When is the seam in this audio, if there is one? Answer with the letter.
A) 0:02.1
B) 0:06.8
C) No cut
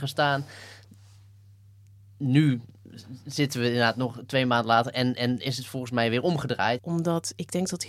B